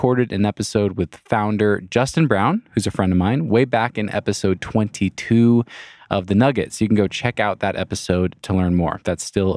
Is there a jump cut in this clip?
no; 0 cuts

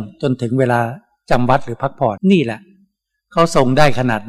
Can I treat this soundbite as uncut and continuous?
no; 1 cut; at 2.2 s

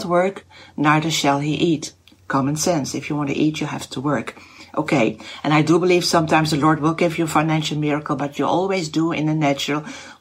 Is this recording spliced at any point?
no; 0 cuts

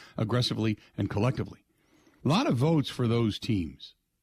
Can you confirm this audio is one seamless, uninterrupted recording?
no; 1 cut; at 2.2 s

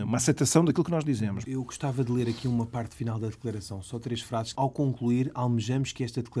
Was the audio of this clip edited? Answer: yes; 2 cuts; at 1.4 s, 4.5 s

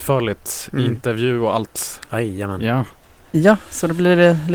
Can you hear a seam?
no; 0 cuts

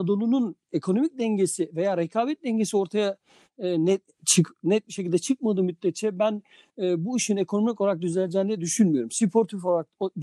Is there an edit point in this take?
no; 0 cuts

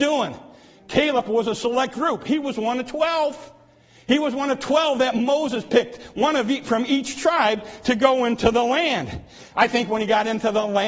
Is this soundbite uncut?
yes; 0 cuts

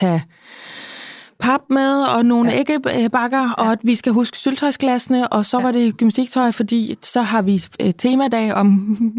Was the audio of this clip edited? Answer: no; 0 cuts

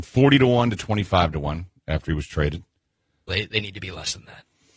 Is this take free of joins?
no; 1 cut; at 3.3 s

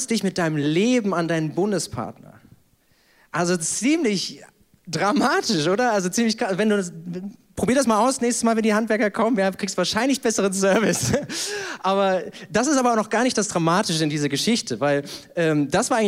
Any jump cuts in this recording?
no; 0 cuts

